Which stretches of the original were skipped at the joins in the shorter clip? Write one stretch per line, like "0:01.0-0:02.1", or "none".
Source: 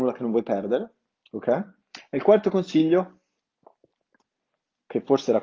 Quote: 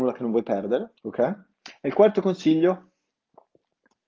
0:01.0-0:01.3

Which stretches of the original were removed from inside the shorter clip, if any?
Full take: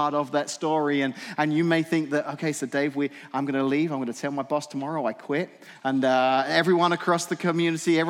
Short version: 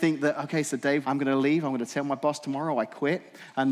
0:02.9-0:03.3

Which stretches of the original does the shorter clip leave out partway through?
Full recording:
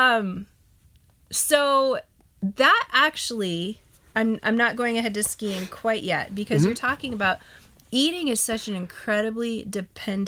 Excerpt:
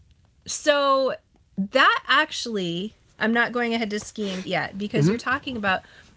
0:04.0-0:04.4
0:05.7-0:06.0

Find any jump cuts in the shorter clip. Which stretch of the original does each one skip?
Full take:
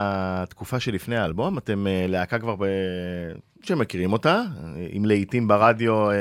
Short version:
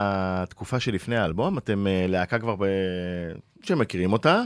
none

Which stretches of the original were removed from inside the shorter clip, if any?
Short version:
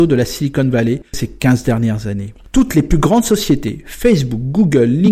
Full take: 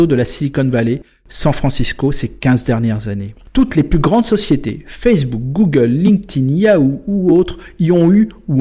0:01.1-0:02.1

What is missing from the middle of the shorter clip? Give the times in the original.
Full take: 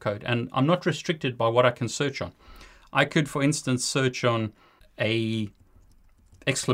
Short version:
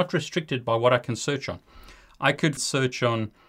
0:03.3-0:03.8

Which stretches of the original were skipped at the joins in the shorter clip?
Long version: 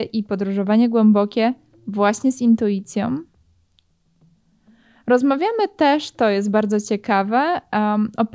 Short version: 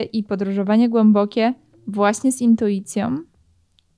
none

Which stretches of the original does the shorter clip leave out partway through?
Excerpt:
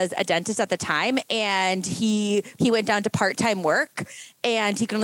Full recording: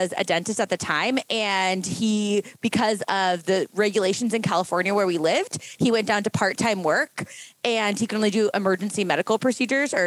0:02.6-0:05.8

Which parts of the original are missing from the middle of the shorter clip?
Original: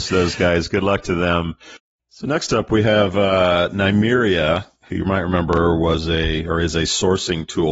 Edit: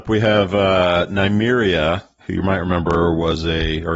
none

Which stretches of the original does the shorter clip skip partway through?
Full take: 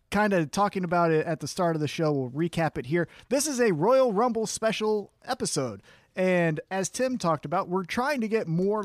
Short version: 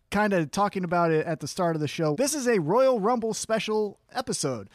0:02.1-0:03.3

